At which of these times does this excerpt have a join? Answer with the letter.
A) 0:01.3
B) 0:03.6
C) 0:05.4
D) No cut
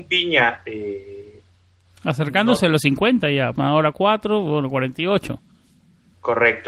B